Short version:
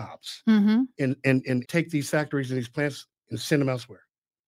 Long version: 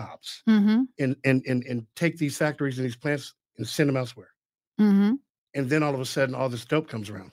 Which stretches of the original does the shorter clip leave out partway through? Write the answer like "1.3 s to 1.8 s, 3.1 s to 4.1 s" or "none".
1.6 s to 1.9 s